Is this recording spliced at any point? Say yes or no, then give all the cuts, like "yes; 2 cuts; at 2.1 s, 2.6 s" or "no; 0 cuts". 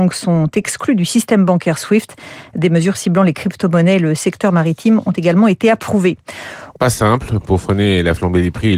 yes; 1 cut; at 6.7 s